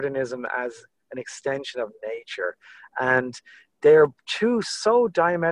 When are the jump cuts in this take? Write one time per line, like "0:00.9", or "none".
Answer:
none